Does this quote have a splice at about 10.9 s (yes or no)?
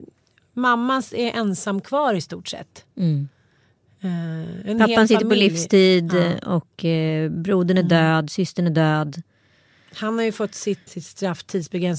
yes